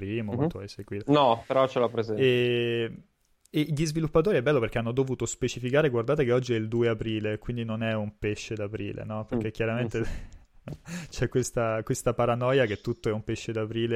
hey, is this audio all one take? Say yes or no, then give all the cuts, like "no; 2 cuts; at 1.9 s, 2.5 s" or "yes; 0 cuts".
yes; 0 cuts